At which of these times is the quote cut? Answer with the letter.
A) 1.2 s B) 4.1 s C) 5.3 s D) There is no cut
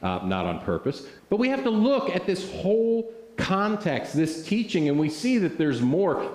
A